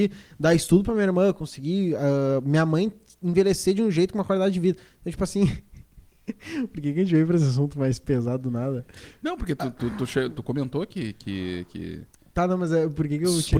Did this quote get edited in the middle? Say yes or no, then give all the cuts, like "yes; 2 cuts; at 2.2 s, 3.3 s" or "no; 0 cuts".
no; 0 cuts